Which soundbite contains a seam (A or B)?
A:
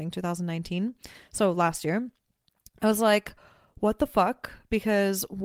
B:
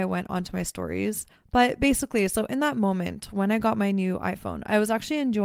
B